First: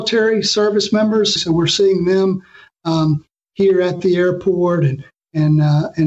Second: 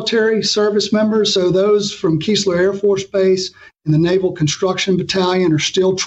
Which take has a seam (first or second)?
first